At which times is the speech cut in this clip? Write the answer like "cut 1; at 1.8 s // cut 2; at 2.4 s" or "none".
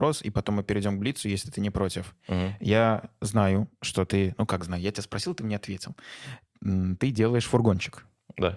none